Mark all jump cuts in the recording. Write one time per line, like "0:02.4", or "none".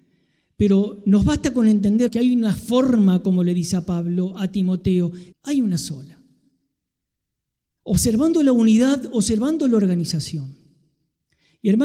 0:02.1
0:05.3